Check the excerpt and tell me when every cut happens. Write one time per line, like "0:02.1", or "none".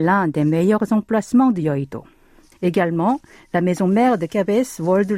0:02.5